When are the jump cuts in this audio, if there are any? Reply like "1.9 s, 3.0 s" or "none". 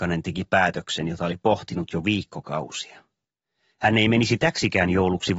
none